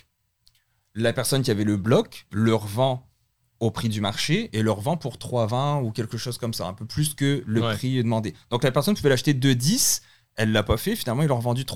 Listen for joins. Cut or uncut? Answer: uncut